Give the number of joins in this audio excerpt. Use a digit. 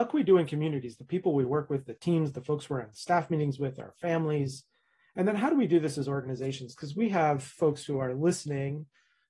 0